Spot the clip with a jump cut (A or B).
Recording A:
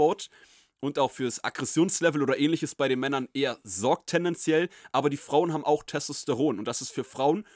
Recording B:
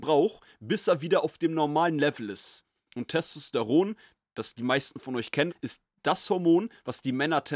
B